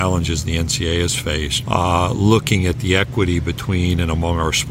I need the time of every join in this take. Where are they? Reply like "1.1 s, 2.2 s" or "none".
1.6 s